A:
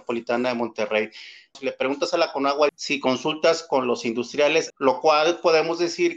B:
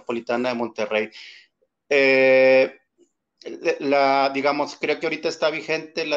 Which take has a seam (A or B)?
A